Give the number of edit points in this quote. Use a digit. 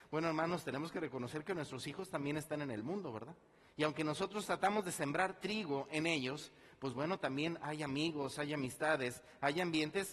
0